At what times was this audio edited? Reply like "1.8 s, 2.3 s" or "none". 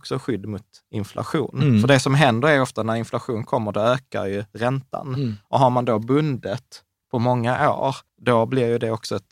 8.1 s